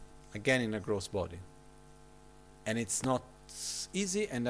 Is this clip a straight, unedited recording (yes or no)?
no